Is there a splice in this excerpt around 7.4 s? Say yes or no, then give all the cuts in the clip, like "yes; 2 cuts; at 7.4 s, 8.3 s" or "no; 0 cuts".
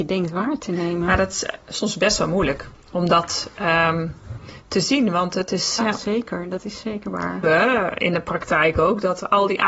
yes; 2 cuts; at 5.8 s, 7.4 s